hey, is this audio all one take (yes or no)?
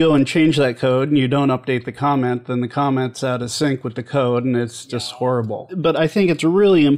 yes